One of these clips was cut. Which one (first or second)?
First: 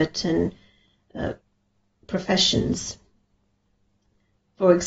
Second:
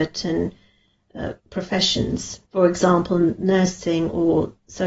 second